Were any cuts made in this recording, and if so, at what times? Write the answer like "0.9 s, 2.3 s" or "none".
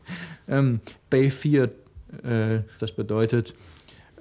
1.0 s, 2.8 s